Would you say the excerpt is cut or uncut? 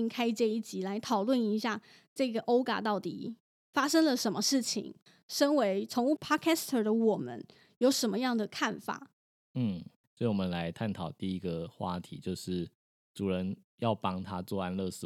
uncut